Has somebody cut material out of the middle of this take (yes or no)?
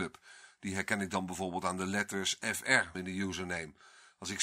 yes